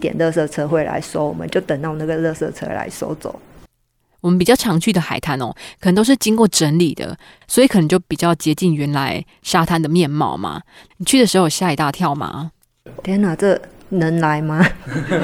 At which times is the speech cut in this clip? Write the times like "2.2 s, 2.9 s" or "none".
10.9 s, 13.0 s